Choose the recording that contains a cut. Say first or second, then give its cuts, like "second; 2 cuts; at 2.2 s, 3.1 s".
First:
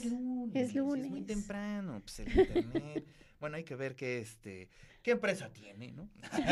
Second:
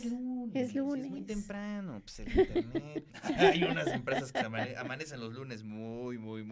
second; 1 cut; at 3.1 s